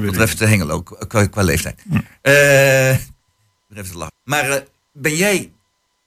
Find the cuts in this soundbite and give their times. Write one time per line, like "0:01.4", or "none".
0:04.1